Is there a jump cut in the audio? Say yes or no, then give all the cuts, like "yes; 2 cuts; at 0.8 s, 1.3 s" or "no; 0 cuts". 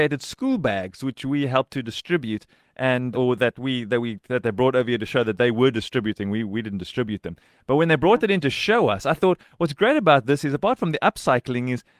yes; 1 cut; at 3.1 s